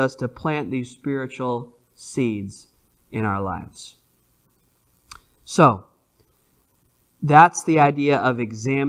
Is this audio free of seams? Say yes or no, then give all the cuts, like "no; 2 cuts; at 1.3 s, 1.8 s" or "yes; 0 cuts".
yes; 0 cuts